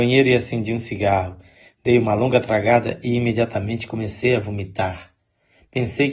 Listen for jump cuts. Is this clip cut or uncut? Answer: uncut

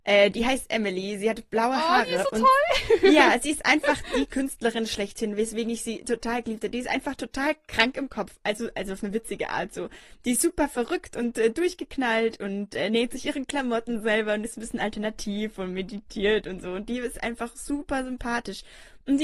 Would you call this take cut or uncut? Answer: uncut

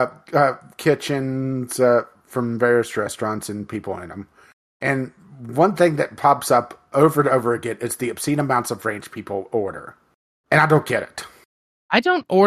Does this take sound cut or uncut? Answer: uncut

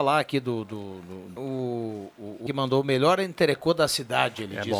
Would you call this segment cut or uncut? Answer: cut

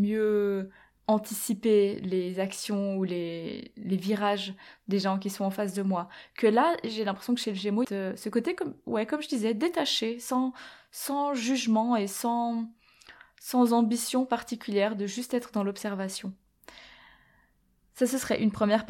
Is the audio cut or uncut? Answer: cut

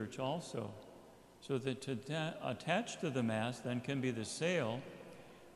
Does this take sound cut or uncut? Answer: uncut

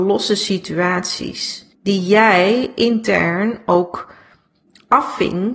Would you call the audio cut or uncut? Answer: cut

